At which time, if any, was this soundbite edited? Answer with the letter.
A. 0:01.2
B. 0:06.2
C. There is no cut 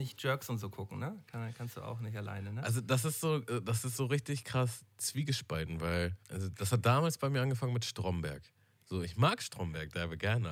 B